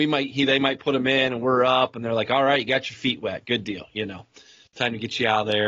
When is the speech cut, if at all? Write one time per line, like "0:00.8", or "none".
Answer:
none